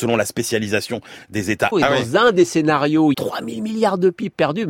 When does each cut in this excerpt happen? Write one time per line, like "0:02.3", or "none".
0:01.7
0:03.1